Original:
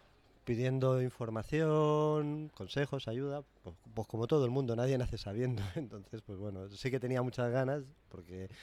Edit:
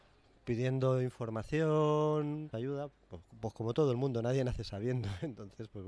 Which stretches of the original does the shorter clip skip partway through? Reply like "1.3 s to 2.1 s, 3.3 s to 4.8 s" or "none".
2.5 s to 3.0 s